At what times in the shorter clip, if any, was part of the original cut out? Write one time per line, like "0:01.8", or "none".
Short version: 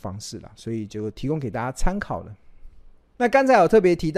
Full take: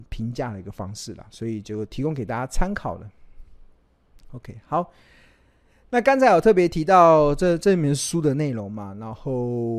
0:03.1

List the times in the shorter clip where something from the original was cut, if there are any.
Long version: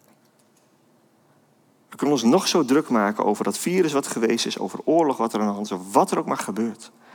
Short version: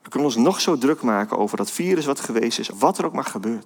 0:02.7

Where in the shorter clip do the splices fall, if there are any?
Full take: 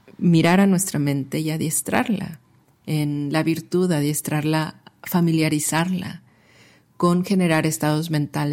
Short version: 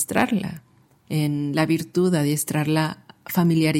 none

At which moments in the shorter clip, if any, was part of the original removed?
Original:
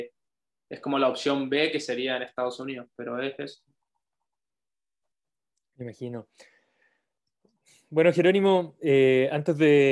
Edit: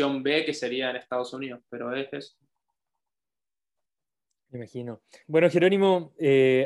0:05.2

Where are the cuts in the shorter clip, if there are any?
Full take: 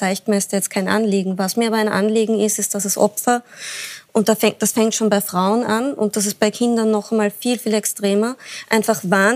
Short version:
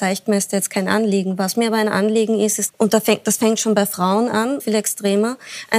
0:02.7
0:04.6

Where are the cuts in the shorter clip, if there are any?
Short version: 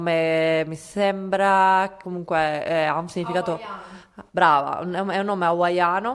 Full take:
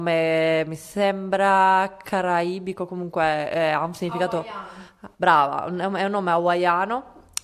0:02.0

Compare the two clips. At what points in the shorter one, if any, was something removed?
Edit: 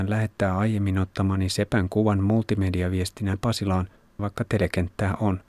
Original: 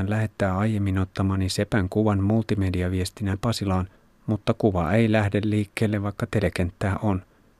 0:04.2

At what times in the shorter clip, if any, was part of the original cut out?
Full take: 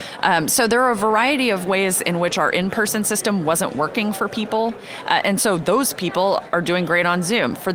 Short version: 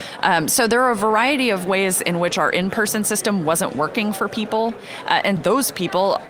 0:05.4

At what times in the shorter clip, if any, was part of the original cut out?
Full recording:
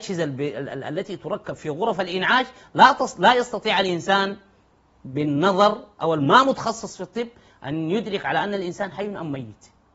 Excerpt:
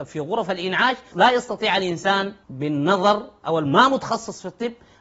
0:01.1
0:02.4

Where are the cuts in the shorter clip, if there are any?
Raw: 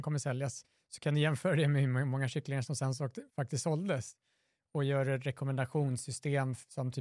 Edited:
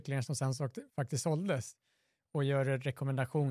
none

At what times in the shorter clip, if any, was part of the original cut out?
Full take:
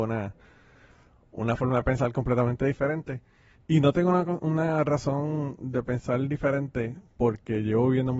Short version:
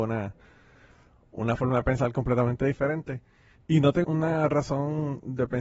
0:04.0

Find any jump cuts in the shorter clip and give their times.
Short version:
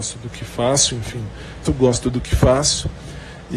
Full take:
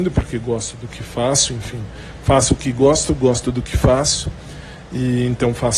0:01.7

